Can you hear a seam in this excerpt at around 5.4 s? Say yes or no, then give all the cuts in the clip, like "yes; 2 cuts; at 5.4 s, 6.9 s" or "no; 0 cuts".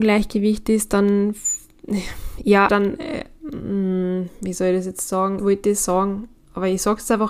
yes; 2 cuts; at 2.7 s, 5.4 s